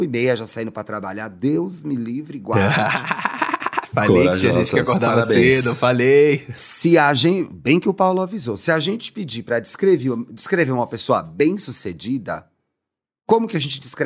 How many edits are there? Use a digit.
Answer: 0